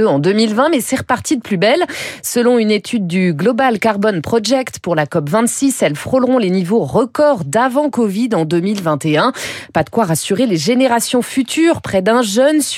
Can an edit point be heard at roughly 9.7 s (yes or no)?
no